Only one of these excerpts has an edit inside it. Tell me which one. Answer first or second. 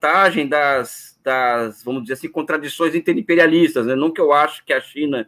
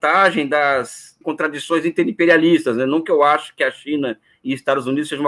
second